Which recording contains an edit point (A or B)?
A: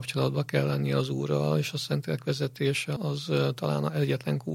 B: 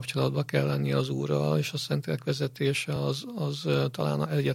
A